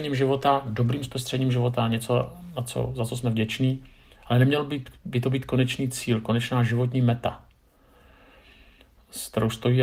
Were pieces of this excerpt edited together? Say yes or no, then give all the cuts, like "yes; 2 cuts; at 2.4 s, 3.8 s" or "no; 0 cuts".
no; 0 cuts